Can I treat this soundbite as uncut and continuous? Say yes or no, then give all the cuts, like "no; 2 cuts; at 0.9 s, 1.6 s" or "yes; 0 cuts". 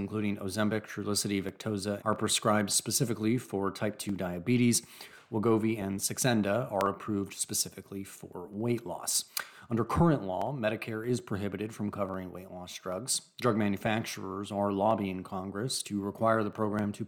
no; 1 cut; at 2.0 s